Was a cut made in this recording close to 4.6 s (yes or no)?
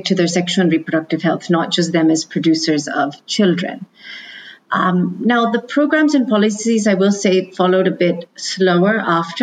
no